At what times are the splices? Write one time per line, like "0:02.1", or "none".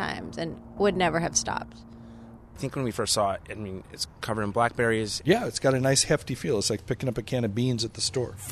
0:02.4
0:05.2